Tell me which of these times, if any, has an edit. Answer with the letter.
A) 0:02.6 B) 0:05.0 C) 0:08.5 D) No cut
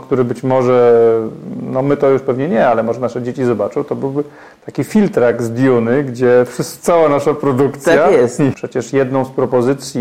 C